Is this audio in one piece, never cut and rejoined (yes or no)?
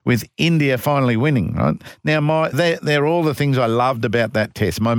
no